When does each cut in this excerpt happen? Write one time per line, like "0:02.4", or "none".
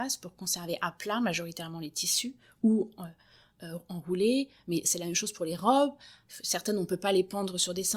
none

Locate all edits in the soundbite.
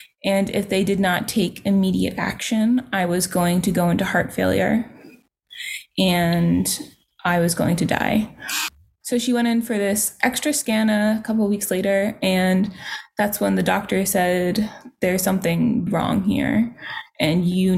0:09.0
0:15.9

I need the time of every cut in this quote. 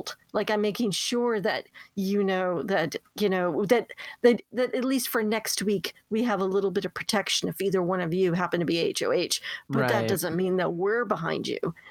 none

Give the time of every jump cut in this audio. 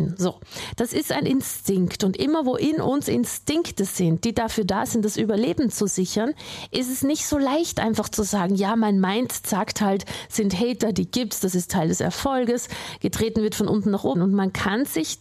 0:10.5
0:14.1

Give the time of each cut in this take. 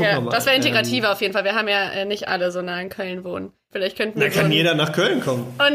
0:03.7

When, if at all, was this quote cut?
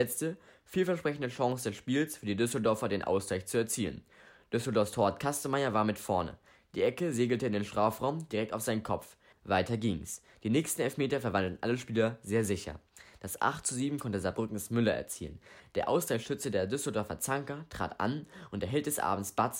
0:09.3

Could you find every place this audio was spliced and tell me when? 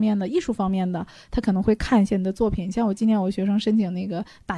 none

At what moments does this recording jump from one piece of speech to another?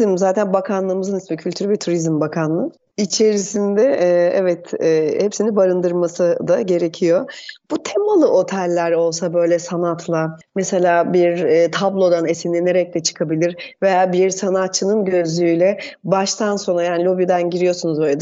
none

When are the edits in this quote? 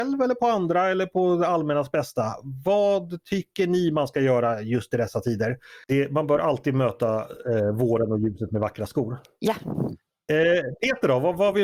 0:05.8

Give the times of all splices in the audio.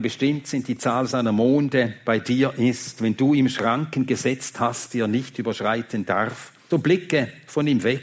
0:06.7

